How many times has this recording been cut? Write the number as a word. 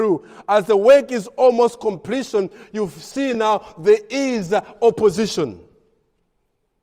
zero